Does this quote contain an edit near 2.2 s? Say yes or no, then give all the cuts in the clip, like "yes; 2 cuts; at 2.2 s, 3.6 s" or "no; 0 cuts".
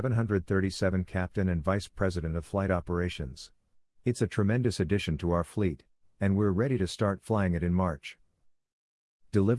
no; 1 cut; at 3.9 s